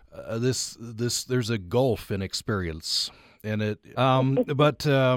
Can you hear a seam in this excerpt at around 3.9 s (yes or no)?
yes